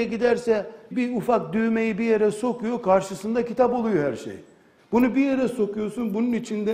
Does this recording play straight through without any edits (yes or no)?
no